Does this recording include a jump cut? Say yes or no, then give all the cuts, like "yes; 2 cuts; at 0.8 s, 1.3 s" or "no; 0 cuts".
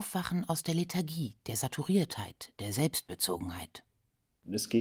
no; 0 cuts